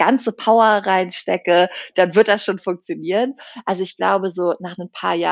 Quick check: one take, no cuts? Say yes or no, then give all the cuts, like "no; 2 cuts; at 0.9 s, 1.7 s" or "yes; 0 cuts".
yes; 0 cuts